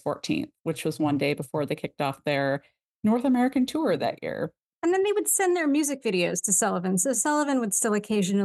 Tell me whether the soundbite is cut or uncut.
uncut